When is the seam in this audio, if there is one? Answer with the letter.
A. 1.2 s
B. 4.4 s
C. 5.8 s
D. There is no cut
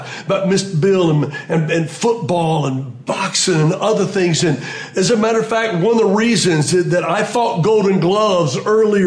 D